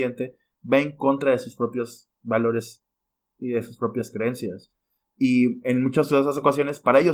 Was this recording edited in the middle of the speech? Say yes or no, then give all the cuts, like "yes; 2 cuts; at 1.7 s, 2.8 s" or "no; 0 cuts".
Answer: yes; 1 cut; at 5.0 s